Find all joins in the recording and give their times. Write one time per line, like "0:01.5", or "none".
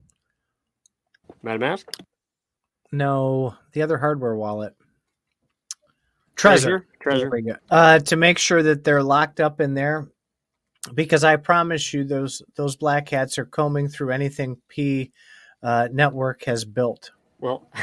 0:07.6

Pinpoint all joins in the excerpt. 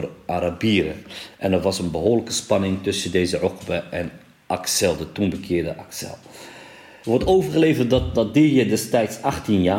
0:07.0

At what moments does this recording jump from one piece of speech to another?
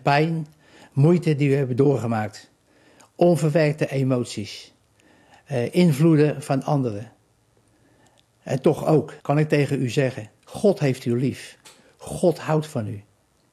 0:09.2
0:10.4

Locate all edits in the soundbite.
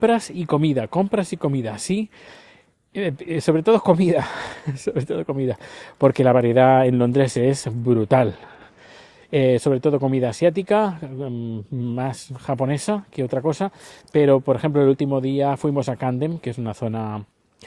none

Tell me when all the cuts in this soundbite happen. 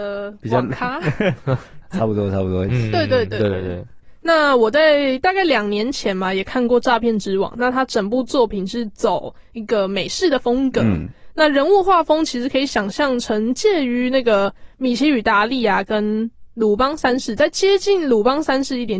0:02.7

